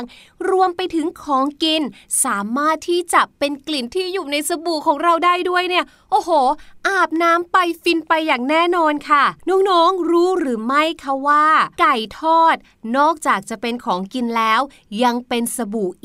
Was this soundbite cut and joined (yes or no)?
yes